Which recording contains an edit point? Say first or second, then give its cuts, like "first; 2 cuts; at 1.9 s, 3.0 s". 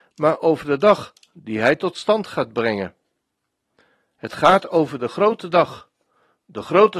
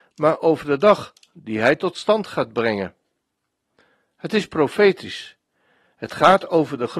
first; 1 cut; at 4.1 s